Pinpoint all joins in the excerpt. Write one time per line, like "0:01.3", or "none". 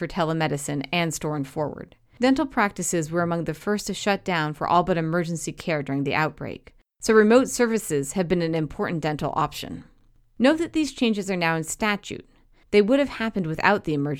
none